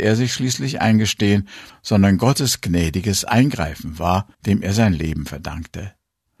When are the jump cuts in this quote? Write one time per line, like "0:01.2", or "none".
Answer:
0:01.7
0:04.3